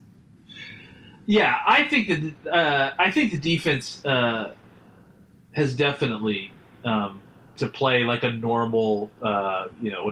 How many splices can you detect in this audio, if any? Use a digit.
1